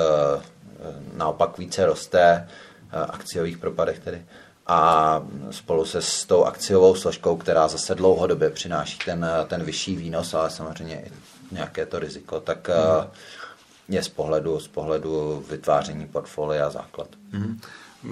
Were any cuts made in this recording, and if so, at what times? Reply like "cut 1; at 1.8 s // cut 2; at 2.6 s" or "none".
none